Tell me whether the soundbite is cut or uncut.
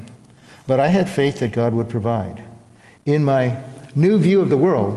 uncut